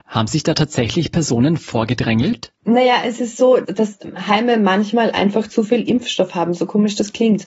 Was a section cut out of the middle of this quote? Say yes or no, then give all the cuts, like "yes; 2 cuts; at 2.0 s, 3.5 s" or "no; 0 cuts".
no; 0 cuts